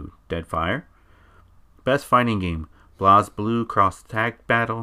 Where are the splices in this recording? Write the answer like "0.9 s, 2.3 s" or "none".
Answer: none